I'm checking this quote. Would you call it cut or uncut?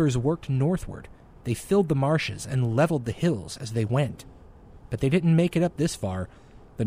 uncut